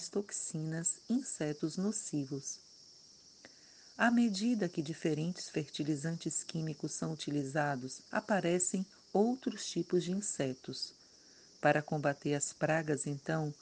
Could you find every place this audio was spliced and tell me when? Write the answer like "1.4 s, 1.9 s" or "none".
8.1 s